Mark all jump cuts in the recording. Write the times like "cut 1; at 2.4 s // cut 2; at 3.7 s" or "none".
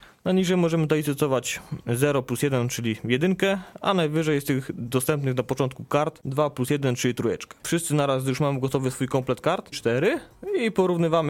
cut 1; at 7.6 s // cut 2; at 9.7 s

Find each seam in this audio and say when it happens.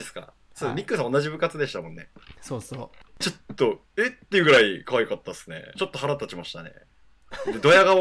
cut 1; at 3.2 s // cut 2; at 5.8 s

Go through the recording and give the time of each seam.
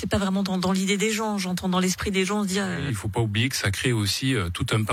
cut 1; at 2.9 s

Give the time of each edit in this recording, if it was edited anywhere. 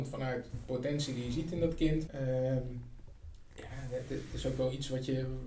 cut 1; at 2.1 s

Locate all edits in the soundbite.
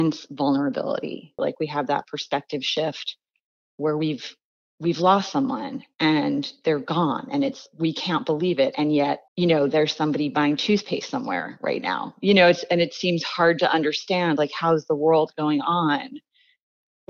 cut 1; at 1.4 s // cut 2; at 9.3 s

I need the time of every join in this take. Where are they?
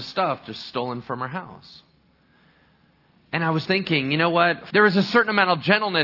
cut 1; at 3.6 s // cut 2; at 4.7 s

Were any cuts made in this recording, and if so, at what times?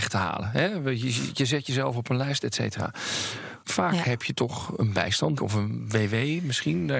cut 1; at 3.6 s // cut 2; at 5.4 s

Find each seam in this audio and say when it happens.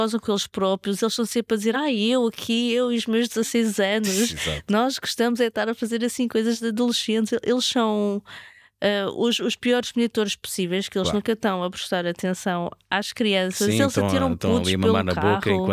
none

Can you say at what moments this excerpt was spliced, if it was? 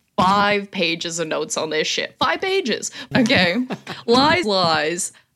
cut 1; at 3.1 s // cut 2; at 4.4 s

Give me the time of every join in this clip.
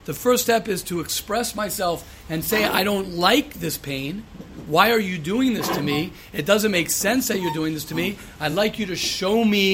none

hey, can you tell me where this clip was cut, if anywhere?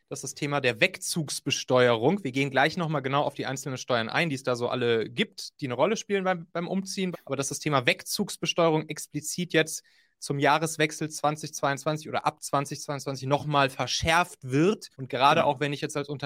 cut 1; at 7.1 s // cut 2; at 14.9 s

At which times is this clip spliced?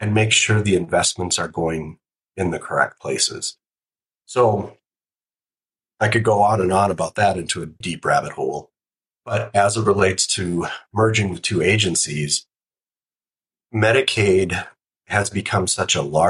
cut 1; at 7.8 s

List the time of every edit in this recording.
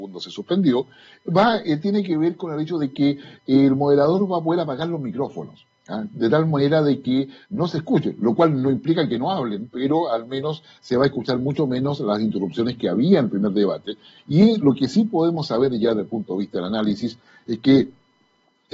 none

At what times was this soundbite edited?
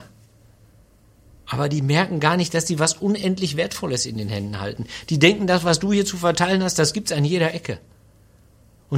none

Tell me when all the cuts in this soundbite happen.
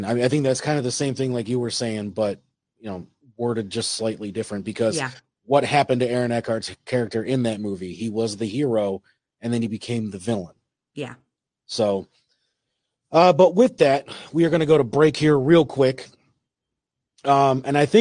none

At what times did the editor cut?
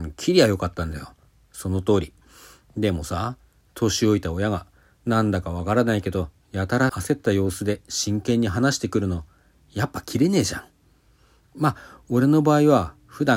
none

